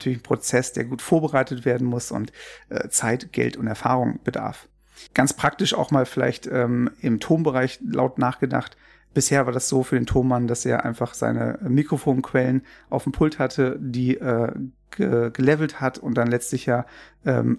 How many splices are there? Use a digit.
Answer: 1